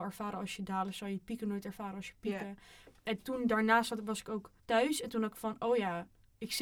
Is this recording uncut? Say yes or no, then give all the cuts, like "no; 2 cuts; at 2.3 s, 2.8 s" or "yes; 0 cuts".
no; 1 cut; at 4.6 s